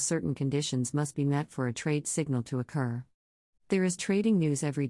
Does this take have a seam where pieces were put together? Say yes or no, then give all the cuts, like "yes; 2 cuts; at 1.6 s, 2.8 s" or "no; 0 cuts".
yes; 1 cut; at 3.6 s